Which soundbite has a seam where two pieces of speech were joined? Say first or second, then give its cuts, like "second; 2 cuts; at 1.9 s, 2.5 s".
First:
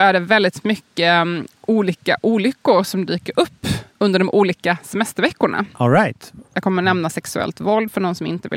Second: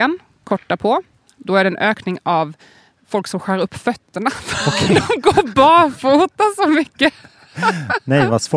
first; 1 cut; at 6.5 s